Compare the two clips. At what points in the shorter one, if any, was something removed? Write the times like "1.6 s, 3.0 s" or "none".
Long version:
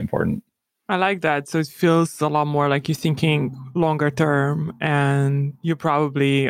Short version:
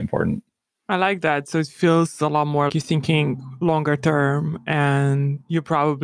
2.7 s